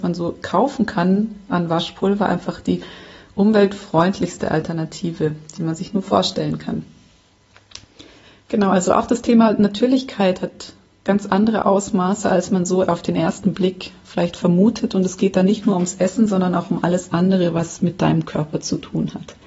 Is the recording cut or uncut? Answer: uncut